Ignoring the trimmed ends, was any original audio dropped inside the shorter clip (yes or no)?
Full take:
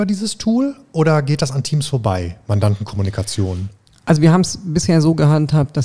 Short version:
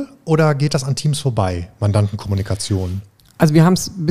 no